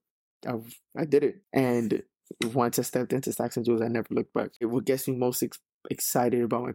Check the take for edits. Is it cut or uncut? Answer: cut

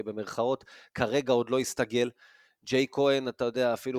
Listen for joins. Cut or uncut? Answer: uncut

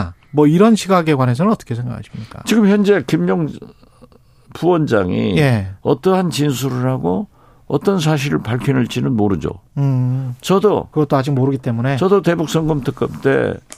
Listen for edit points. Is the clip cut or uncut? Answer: uncut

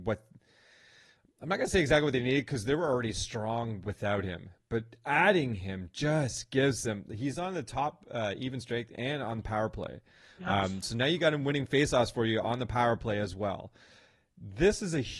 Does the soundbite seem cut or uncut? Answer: uncut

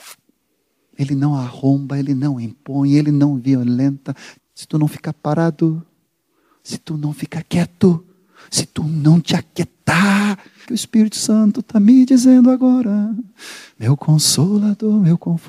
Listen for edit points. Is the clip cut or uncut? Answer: cut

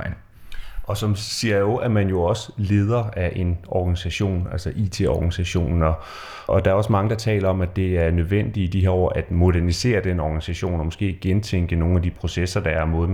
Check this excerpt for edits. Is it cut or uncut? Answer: cut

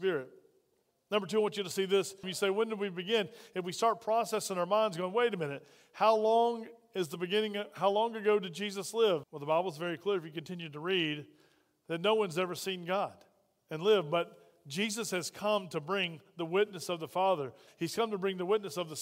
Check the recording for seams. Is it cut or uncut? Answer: cut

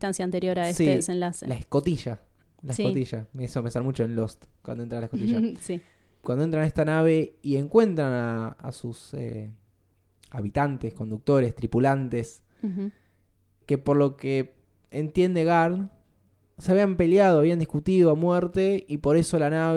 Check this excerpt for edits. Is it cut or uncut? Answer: uncut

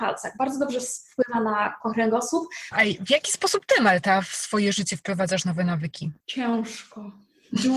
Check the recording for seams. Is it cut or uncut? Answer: cut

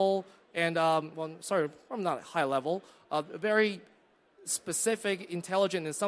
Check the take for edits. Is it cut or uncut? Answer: uncut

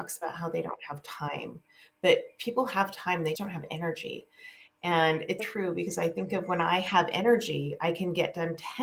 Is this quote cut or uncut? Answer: cut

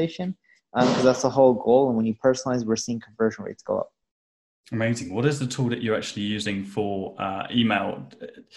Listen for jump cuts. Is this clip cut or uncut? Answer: uncut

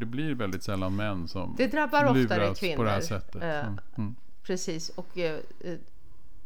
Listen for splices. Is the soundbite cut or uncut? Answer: uncut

